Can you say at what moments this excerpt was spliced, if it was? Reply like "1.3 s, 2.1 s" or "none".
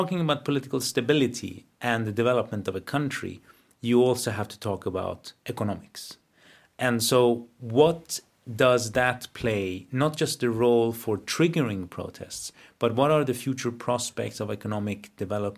none